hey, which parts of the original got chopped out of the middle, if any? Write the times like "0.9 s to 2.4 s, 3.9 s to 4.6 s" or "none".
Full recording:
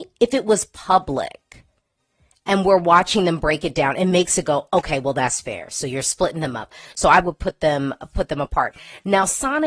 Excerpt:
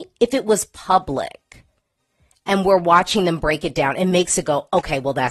none